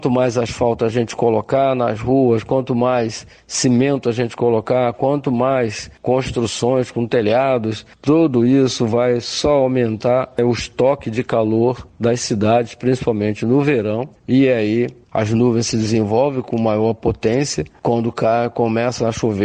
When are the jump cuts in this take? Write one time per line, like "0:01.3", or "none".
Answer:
none